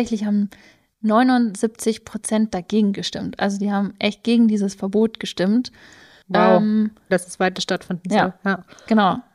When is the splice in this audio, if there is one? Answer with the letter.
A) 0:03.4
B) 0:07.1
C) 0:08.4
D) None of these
B